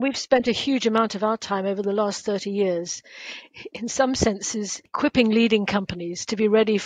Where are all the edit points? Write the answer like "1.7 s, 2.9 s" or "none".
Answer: none